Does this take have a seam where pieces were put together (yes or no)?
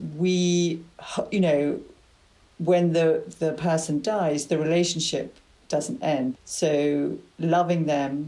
yes